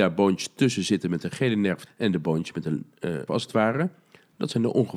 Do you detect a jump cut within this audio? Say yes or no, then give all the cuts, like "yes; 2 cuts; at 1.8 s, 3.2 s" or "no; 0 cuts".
yes; 2 cuts; at 1.9 s, 3.3 s